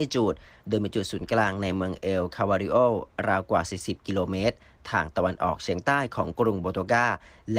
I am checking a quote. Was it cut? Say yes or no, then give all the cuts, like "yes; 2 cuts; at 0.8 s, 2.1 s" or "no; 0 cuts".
no; 0 cuts